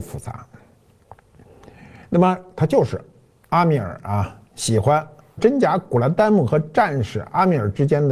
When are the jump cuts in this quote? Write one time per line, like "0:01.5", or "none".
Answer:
0:05.4

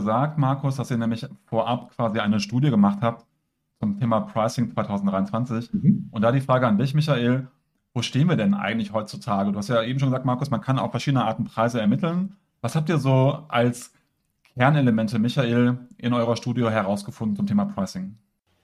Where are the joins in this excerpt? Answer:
none

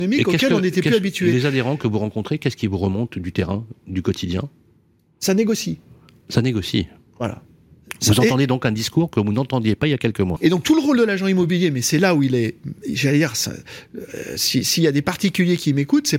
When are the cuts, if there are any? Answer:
0:10.4

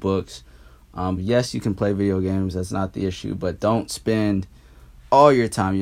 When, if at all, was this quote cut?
0:01.2

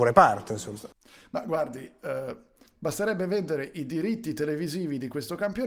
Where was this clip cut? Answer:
0:02.7

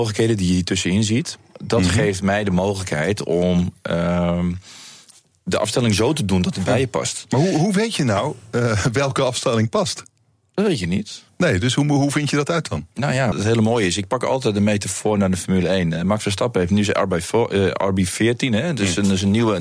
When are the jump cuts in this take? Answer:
0:13.3

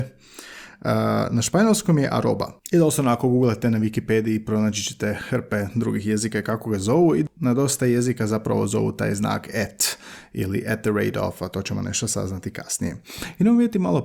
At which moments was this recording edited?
none

